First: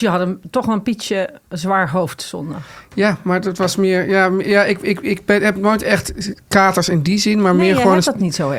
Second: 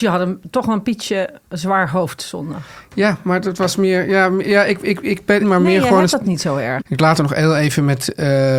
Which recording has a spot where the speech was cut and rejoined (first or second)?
second